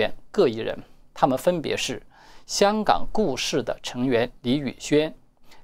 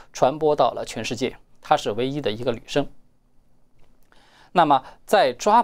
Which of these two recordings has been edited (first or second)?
second